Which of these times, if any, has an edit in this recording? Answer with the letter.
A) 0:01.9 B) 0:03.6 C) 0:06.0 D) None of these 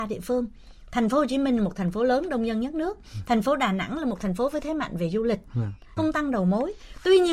C